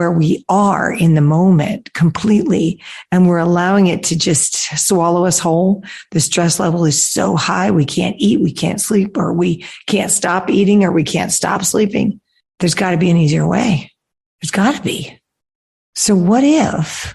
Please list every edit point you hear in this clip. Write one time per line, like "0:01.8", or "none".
none